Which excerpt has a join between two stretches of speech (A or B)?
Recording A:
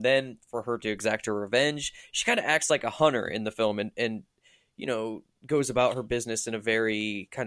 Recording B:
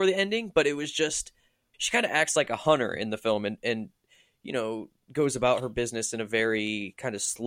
B